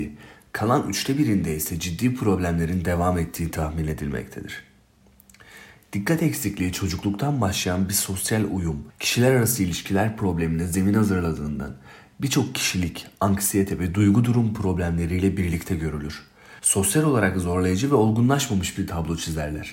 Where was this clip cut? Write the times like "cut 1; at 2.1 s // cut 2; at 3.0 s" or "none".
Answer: cut 1; at 16.6 s

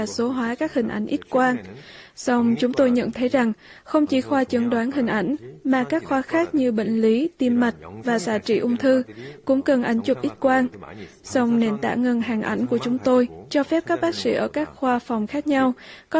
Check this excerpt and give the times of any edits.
cut 1; at 11.2 s

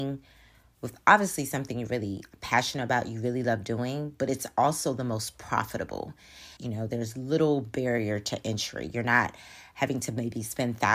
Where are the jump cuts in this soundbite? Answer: cut 1; at 6.6 s

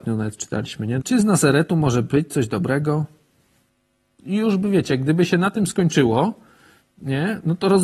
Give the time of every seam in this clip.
cut 1; at 1.0 s

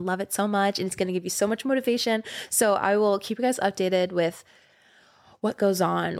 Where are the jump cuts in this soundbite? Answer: none

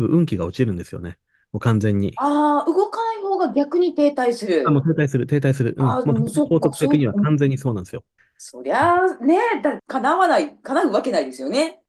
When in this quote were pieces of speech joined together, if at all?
cut 1; at 8.2 s // cut 2; at 9.8 s

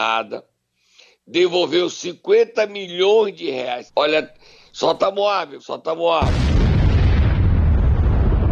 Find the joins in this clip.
cut 1; at 3.9 s // cut 2; at 5.6 s

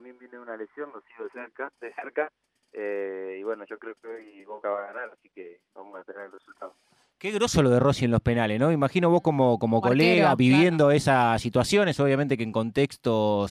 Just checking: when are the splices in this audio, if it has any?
none

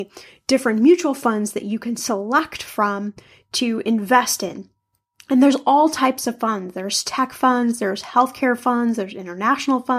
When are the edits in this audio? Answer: none

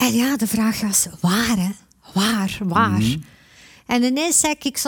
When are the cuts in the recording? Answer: none

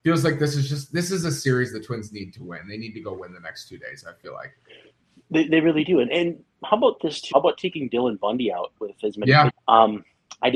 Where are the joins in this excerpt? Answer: cut 1; at 7.3 s // cut 2; at 9.5 s

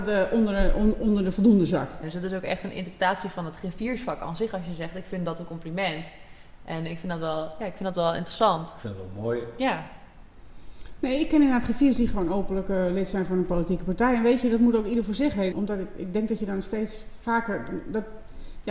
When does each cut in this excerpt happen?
cut 1; at 2.0 s // cut 2; at 15.5 s

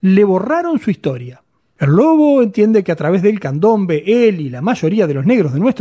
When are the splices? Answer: cut 1; at 1.8 s

